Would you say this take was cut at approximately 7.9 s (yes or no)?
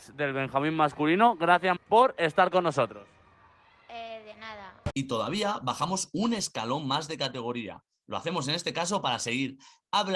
no